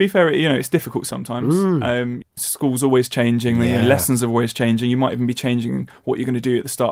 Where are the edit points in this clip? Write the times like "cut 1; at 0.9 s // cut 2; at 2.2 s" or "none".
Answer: none